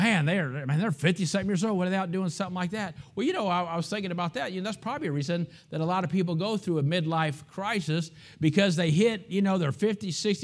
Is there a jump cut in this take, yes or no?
no